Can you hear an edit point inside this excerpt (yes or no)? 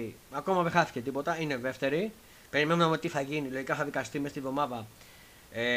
no